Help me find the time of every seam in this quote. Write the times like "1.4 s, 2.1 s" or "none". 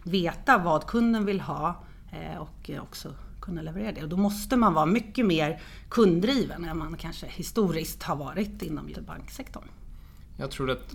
8.9 s